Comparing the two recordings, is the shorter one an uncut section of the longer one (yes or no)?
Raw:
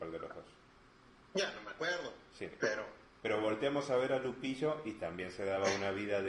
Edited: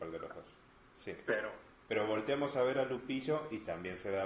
no